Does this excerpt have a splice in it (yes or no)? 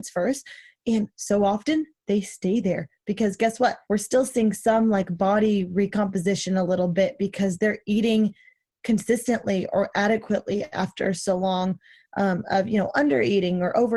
yes